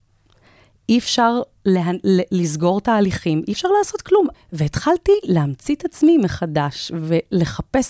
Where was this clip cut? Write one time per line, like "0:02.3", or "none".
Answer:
0:04.3